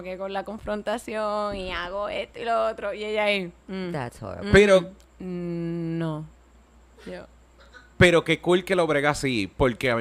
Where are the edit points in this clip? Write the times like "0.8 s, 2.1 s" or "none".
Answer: 3.6 s